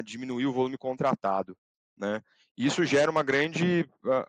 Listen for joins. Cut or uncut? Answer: uncut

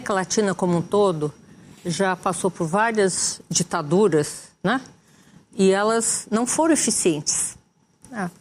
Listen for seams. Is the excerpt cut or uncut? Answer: uncut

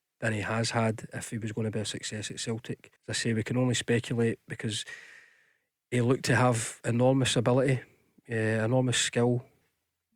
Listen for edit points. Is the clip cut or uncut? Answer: cut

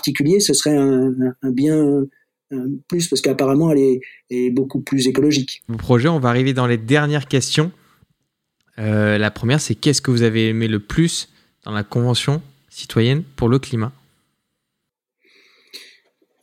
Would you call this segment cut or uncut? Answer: cut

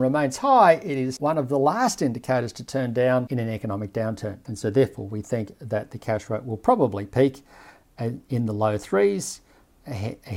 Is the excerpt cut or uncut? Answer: cut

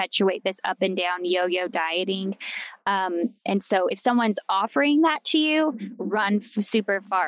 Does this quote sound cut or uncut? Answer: uncut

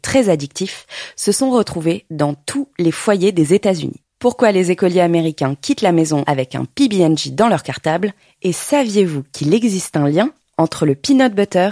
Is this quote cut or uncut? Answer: uncut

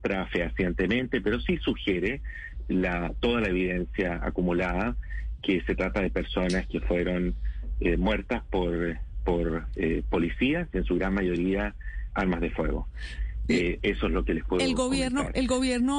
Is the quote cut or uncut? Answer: uncut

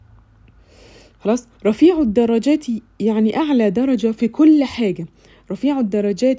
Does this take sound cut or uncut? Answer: cut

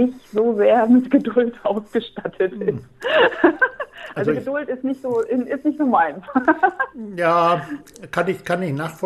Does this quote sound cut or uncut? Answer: uncut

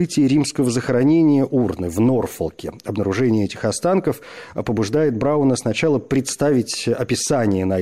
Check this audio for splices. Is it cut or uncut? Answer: uncut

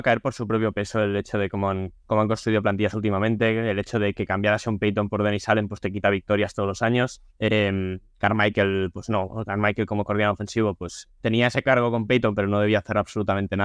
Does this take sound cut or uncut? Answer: cut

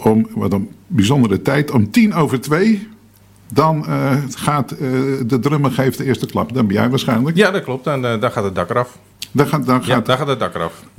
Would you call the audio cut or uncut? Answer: uncut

